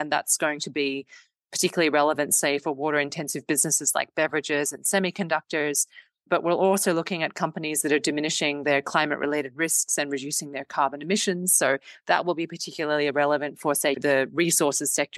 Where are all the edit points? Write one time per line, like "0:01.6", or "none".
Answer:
0:13.9